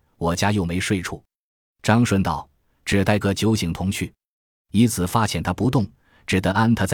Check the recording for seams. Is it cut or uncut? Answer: cut